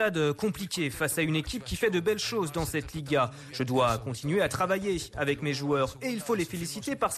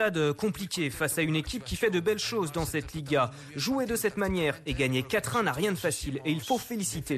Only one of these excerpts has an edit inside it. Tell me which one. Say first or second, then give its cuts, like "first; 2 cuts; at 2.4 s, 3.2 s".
first; 1 cut; at 3.5 s